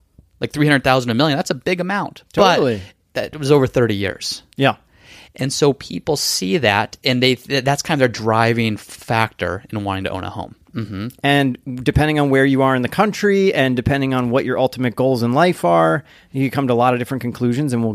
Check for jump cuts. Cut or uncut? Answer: cut